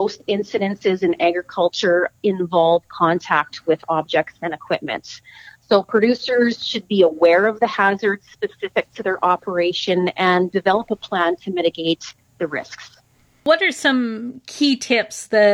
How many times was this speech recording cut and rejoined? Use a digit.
0